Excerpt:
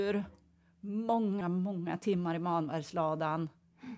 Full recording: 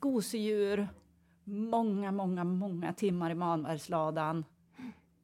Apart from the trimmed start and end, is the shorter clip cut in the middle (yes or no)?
yes